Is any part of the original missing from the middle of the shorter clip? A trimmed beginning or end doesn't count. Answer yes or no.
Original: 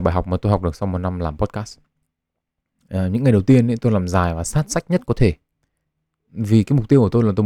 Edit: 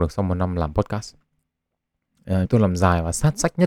yes